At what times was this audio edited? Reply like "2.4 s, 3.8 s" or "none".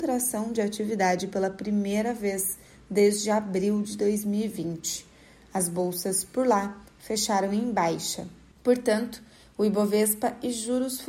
8.5 s

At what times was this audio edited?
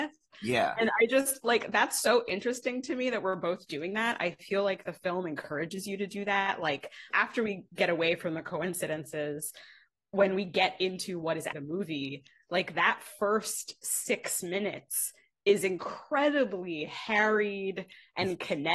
7.1 s, 11.5 s

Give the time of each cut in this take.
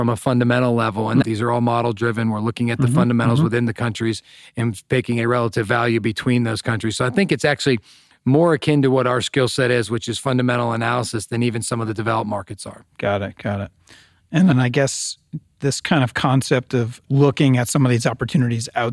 1.2 s, 14.5 s

